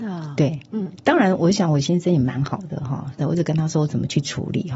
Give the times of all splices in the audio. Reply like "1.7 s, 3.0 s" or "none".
3.2 s